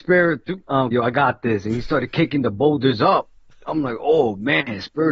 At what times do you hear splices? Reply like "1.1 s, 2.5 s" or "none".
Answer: 0.9 s